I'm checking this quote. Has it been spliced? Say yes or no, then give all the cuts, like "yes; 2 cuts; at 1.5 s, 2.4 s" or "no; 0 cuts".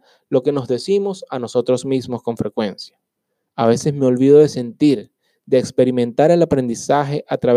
yes; 1 cut; at 3.5 s